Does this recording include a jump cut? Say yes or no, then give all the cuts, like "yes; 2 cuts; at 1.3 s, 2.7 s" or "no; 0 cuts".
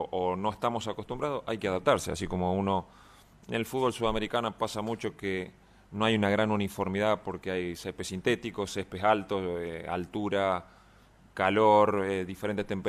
no; 0 cuts